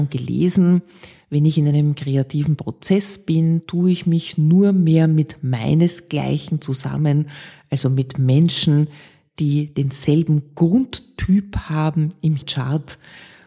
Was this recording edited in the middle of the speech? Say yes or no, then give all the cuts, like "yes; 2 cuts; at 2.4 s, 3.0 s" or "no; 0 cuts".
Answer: no; 0 cuts